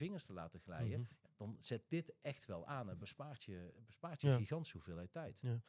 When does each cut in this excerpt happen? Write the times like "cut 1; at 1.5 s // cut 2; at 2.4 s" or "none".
cut 1; at 1.2 s